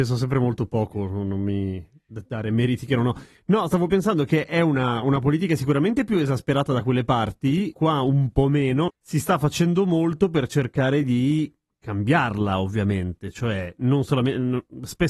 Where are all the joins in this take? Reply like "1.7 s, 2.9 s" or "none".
7.7 s, 8.9 s